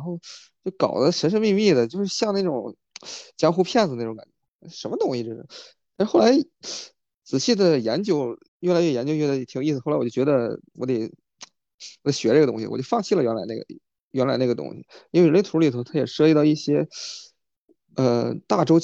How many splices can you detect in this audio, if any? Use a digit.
1